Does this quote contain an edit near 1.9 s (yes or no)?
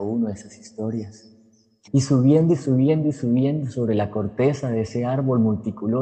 yes